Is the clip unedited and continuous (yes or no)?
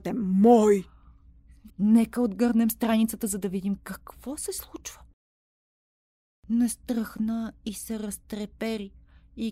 no